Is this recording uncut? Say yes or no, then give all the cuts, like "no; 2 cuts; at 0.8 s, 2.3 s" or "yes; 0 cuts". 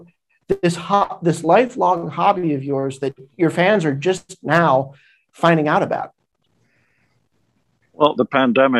yes; 0 cuts